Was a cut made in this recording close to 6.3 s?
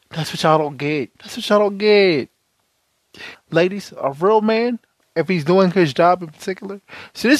no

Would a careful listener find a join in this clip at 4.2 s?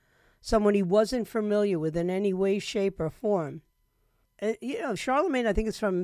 yes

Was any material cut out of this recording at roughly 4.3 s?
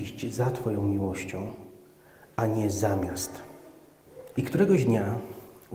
yes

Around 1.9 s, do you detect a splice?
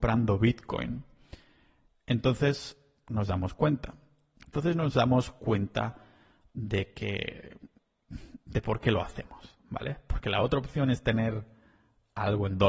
no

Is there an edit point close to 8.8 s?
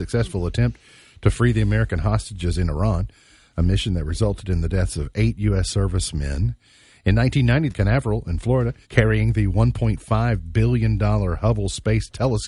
yes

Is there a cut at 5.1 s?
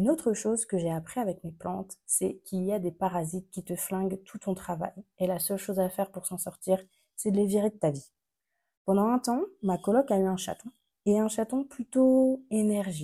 no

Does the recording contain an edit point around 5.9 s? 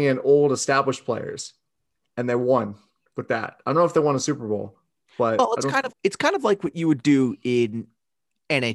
yes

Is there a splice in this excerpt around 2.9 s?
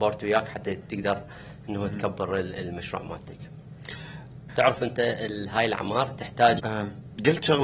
no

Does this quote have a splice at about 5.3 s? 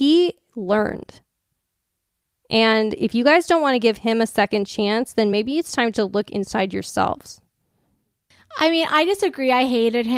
no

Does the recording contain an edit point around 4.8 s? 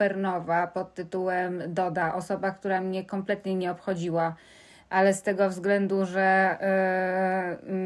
no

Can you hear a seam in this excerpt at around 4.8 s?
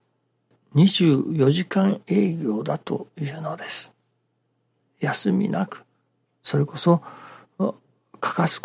yes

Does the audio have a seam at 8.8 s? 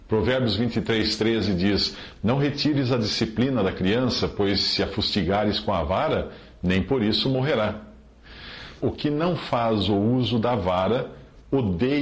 yes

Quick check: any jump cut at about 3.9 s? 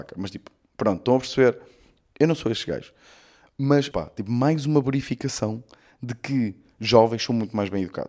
yes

